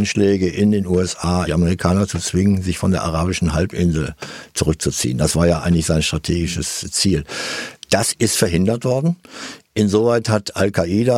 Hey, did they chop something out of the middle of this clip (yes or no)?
yes